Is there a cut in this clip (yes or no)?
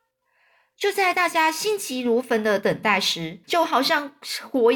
yes